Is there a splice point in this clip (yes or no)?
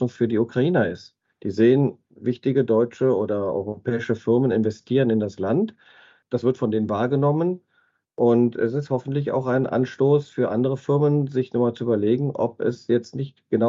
no